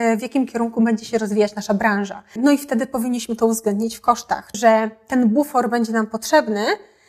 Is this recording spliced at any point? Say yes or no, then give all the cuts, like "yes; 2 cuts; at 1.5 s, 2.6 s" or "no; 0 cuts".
yes; 2 cuts; at 2.4 s, 4.5 s